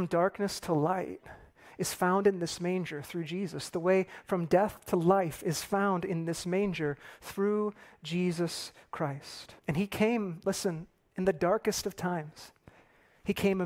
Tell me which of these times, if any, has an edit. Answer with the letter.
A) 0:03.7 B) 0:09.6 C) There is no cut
B